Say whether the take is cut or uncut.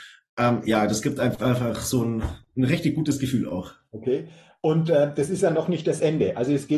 uncut